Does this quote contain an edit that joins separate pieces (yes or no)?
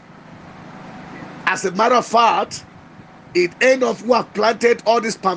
no